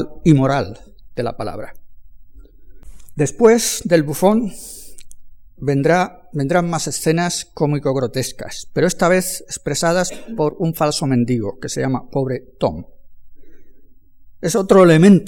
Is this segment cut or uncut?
uncut